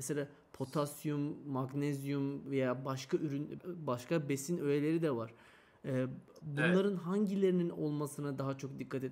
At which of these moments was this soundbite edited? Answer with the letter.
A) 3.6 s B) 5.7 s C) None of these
A